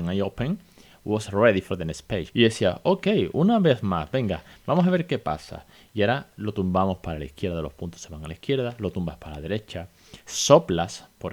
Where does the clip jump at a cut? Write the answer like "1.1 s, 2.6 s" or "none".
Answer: 2.3 s